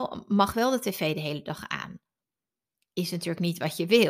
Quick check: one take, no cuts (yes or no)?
yes